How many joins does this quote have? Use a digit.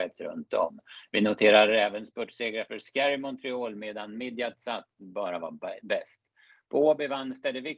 0